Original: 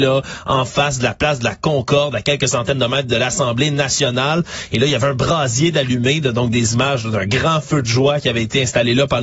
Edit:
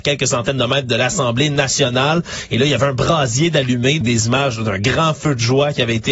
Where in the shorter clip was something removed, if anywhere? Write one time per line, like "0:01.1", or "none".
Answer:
0:04.0